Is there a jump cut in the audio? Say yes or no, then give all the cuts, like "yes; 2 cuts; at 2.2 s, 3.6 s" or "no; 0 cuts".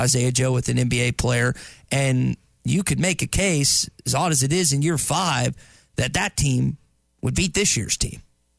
no; 0 cuts